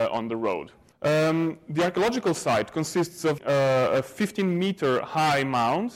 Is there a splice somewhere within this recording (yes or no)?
yes